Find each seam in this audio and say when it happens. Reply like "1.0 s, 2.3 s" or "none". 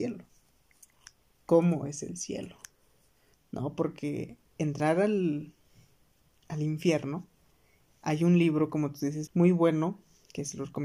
3.3 s, 9.3 s